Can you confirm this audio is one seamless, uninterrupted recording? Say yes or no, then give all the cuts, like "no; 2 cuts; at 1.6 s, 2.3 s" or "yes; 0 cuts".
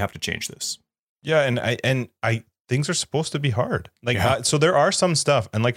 no; 1 cut; at 4.0 s